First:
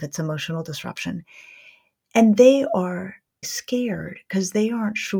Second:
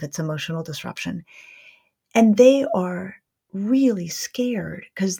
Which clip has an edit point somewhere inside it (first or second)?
first